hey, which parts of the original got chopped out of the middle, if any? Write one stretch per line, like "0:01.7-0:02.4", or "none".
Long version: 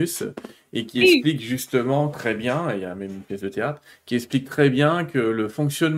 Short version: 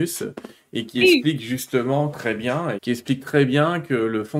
0:02.8-0:04.0